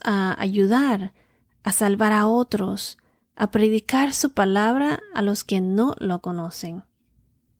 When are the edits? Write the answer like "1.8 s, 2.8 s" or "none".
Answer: none